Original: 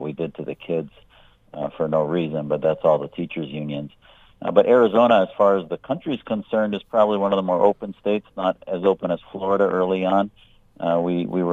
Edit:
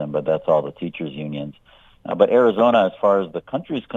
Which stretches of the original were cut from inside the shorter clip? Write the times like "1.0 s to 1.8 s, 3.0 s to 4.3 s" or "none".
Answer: none